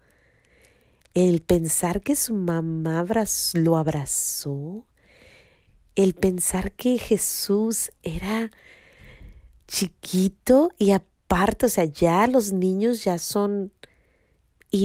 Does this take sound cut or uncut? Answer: uncut